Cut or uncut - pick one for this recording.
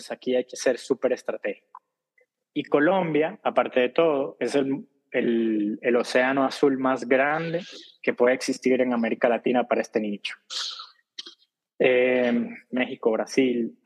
cut